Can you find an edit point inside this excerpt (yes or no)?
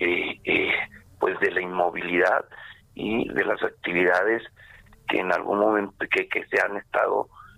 no